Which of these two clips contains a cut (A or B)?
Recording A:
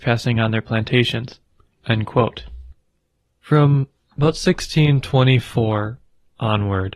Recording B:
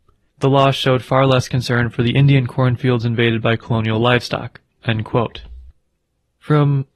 A